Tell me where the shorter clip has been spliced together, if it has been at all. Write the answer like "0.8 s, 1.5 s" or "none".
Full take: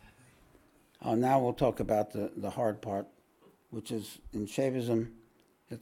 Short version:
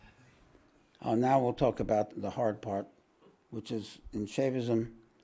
2.1 s